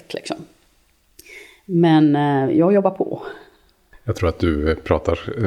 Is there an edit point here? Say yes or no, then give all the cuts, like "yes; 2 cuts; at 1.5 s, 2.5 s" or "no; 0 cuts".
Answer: no; 0 cuts